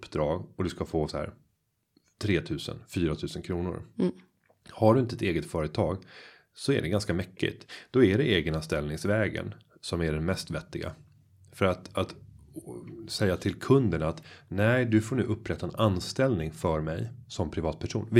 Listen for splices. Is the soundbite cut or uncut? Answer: uncut